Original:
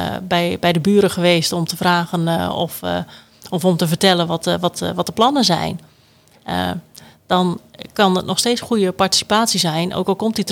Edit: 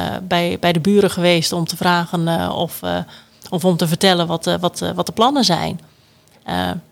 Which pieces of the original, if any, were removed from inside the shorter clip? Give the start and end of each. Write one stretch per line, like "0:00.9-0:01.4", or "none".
none